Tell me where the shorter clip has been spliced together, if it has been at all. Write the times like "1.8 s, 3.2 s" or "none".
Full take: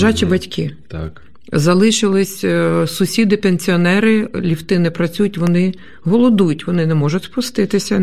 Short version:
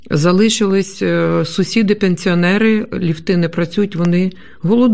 none